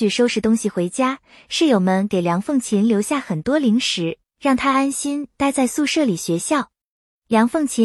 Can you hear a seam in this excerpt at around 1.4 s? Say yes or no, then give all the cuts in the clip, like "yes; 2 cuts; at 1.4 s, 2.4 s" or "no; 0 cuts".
no; 0 cuts